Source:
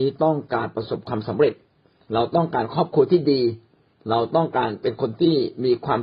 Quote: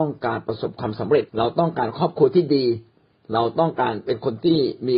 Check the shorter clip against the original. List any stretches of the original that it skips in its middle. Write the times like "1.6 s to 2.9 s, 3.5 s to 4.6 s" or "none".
1.6 s to 2.0 s